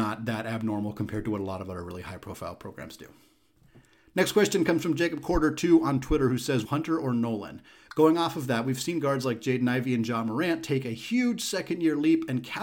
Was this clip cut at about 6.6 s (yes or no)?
yes